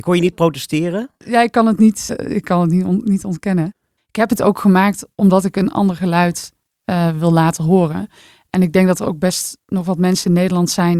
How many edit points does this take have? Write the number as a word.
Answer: two